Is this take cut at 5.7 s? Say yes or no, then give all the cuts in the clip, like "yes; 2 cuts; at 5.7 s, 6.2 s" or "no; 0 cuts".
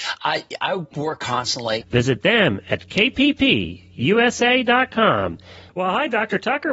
yes; 2 cuts; at 1.8 s, 5.7 s